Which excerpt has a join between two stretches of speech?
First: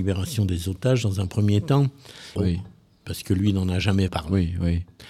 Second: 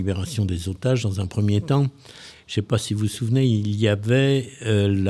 first; 2 cuts; at 2.4 s, 4.1 s

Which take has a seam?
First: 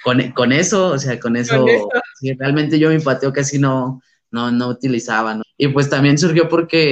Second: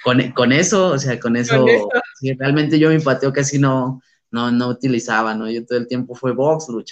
first; 1 cut; at 5.4 s

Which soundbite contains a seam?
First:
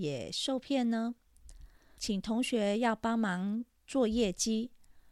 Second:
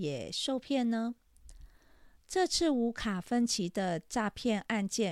first; 1 cut; at 2.0 s

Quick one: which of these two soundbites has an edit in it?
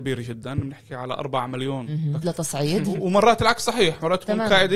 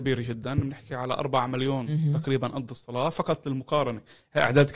first; 1 cut; at 2.2 s

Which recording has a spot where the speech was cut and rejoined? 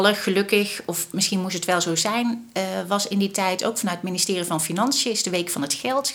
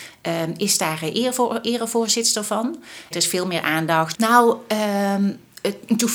second; 2 cuts; at 3.1 s, 4.1 s

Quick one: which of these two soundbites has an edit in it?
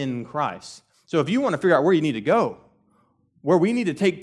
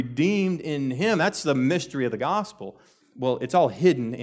second; 1 cut; at 3.0 s

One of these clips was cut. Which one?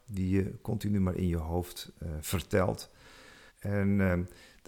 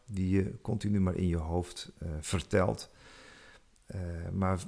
first; 1 cut; at 3.5 s

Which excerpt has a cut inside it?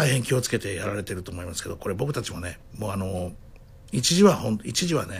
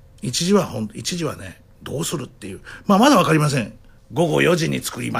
second; 1 cut; at 4.0 s

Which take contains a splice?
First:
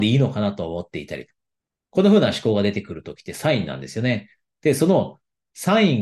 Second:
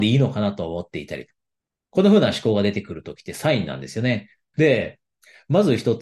second; 1 cut; at 4.5 s

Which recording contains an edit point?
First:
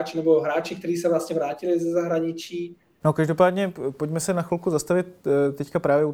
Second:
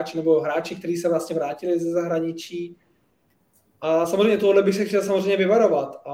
first; 1 cut; at 3.0 s

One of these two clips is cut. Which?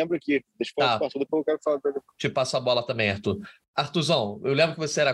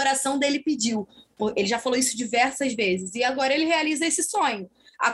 first; 1 cut; at 3.6 s

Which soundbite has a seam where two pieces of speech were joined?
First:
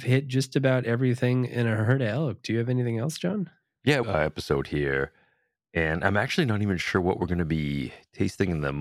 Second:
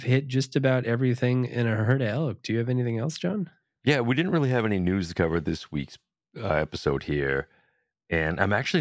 first; 1 cut; at 4.0 s

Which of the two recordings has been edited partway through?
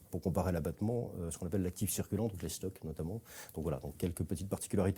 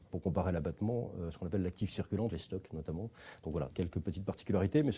second; 2 cuts; at 2.3 s, 3.7 s

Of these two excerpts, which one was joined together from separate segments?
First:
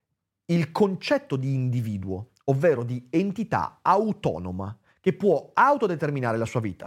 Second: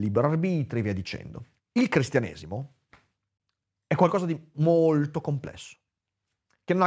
second; 2 cuts; at 1.6 s, 4.5 s

